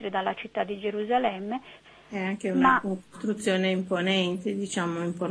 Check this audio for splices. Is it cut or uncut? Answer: cut